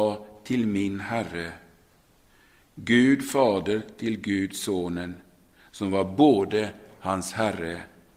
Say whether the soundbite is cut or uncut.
uncut